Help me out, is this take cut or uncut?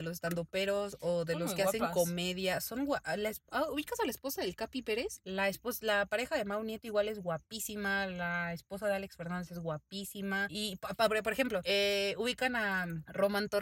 cut